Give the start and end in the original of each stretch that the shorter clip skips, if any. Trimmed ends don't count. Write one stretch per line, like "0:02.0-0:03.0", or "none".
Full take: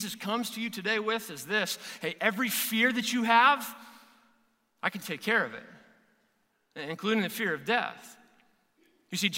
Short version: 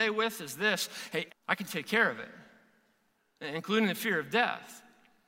0:02.2-0:04.6